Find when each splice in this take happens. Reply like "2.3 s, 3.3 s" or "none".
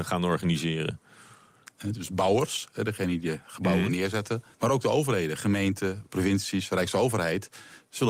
1.7 s, 4.5 s, 6.1 s